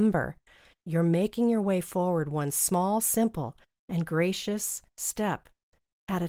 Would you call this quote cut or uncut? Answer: uncut